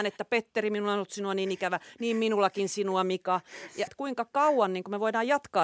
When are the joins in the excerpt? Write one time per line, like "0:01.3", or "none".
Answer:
0:03.9